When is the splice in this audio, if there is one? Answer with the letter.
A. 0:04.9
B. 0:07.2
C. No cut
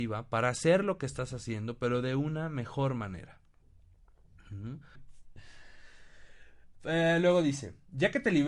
A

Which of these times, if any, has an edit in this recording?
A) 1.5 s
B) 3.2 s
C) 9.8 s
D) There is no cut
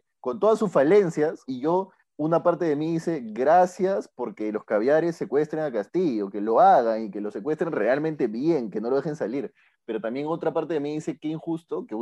A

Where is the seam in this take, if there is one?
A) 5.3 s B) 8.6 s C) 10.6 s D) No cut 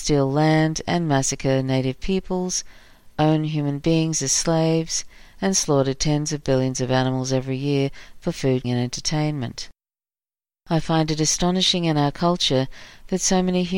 B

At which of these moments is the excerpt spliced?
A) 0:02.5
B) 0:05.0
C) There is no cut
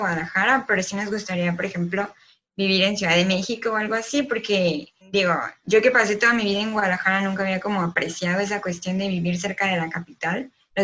B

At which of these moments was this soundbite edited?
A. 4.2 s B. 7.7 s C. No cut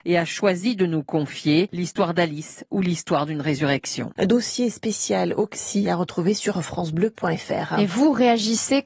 A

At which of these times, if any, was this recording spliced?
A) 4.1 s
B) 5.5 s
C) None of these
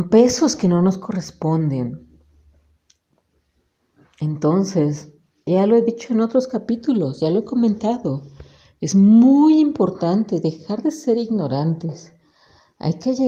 B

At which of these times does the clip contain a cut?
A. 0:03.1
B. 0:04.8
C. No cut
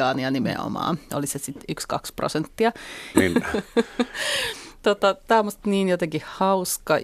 A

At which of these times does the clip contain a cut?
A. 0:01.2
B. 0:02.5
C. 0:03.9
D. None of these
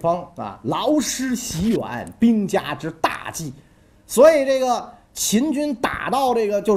D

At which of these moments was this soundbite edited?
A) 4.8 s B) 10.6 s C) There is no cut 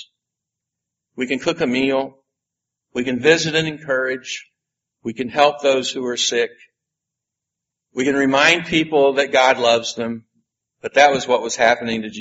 B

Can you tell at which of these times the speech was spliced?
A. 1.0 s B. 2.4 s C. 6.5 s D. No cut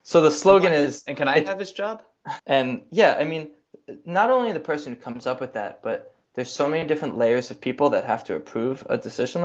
B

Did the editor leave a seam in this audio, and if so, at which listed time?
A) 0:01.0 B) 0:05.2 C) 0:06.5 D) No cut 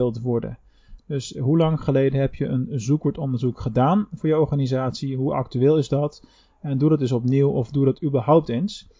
D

